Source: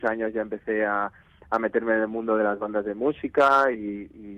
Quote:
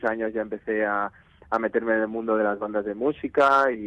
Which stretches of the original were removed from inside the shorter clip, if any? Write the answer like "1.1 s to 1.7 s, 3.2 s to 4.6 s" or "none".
none